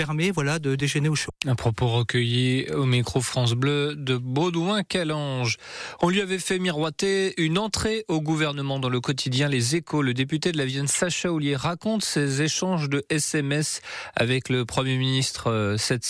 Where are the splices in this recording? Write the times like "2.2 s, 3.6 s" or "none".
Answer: 1.4 s